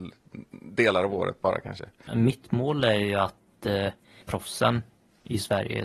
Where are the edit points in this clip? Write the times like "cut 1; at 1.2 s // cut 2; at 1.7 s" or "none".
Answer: cut 1; at 2.1 s // cut 2; at 4.2 s